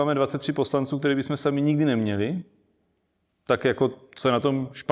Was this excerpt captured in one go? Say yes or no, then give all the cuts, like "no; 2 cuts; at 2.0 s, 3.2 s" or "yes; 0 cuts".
yes; 0 cuts